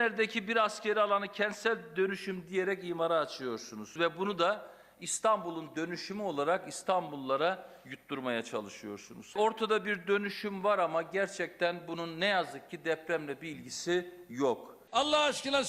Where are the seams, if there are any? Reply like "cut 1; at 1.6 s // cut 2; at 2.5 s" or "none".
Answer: none